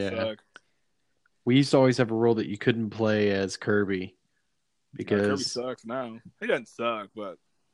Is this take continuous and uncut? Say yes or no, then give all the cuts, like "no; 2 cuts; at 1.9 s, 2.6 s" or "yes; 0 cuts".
yes; 0 cuts